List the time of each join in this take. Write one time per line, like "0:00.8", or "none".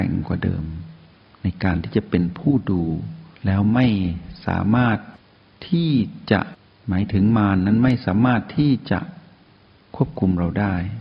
0:03.3